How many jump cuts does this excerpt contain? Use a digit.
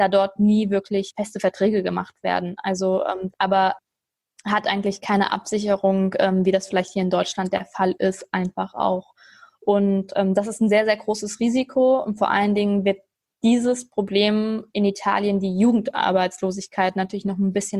1